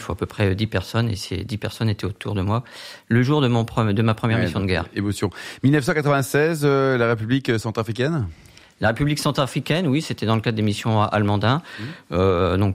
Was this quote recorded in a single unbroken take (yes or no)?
yes